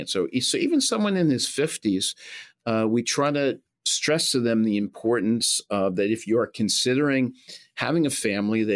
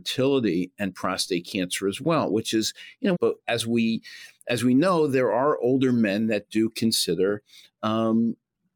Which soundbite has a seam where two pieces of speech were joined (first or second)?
second